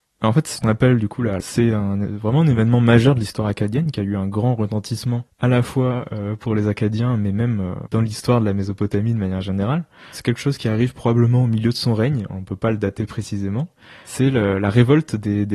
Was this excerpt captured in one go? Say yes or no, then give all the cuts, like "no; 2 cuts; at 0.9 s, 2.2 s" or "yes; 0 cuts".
no; 1 cut; at 1.4 s